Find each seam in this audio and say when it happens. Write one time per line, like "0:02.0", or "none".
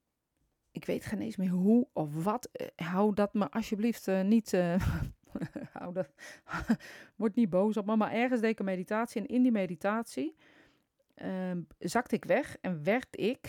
none